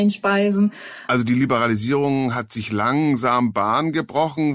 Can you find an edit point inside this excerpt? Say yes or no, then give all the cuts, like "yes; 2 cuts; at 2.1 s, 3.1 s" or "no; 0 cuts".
yes; 1 cut; at 1.1 s